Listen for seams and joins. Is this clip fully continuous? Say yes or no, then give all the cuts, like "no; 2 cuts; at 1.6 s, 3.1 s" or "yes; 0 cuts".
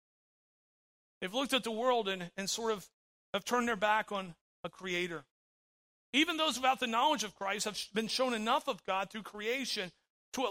yes; 0 cuts